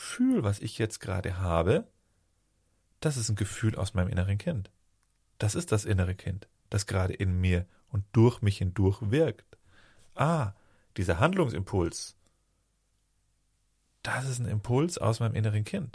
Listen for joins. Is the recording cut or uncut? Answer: uncut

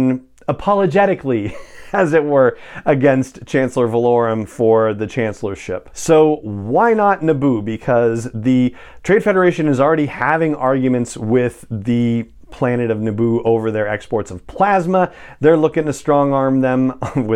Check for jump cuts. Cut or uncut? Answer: cut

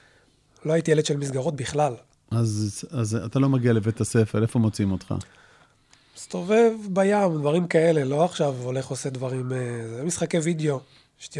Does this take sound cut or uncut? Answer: uncut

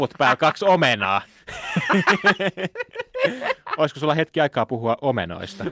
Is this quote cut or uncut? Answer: uncut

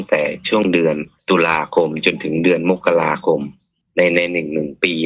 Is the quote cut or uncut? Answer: uncut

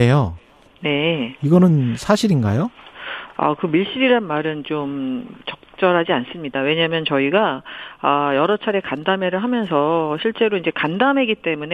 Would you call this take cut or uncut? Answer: uncut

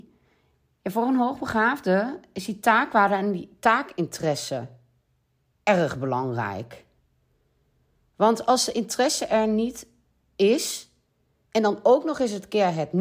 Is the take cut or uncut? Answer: uncut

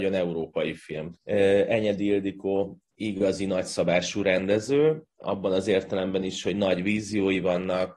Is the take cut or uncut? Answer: cut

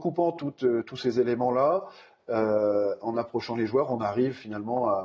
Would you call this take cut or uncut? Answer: uncut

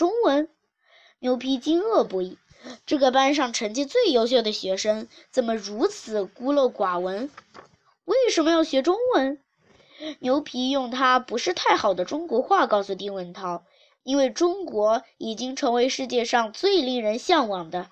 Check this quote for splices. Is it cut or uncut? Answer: uncut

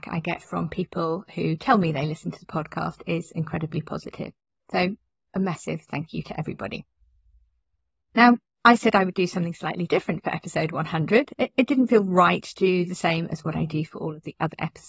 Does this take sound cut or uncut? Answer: uncut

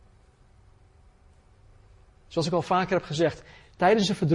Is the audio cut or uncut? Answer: uncut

